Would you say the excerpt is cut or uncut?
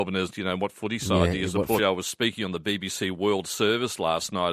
cut